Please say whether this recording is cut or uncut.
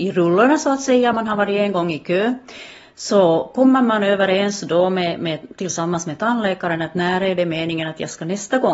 uncut